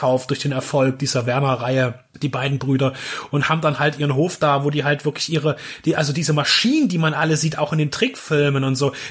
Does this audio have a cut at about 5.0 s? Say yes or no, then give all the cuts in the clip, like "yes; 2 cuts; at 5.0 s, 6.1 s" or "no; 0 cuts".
no; 0 cuts